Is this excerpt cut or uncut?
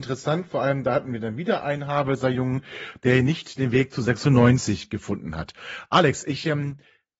uncut